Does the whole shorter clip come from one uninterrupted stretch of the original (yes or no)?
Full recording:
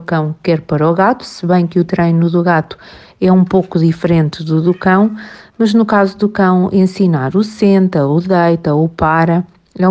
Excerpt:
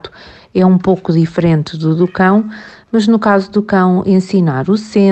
yes